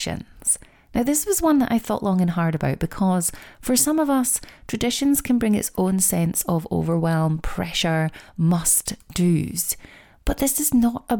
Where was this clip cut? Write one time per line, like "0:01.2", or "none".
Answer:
none